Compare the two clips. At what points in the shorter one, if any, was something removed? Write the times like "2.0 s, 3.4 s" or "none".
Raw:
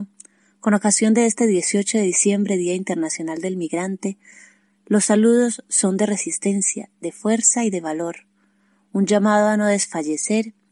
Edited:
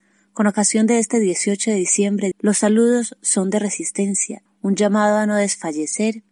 2.3 s, 4.5 s